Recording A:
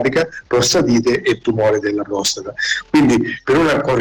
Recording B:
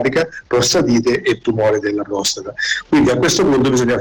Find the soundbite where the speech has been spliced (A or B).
B